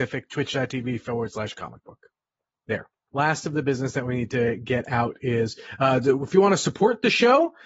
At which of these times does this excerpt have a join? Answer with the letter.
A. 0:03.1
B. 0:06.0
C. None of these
A